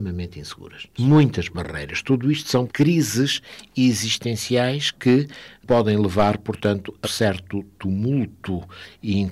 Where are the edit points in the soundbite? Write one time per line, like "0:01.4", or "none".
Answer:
0:01.0
0:02.7
0:07.0